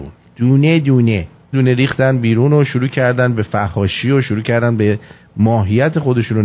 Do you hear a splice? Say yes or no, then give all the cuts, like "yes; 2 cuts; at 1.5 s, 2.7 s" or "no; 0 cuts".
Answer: yes; 1 cut; at 1.5 s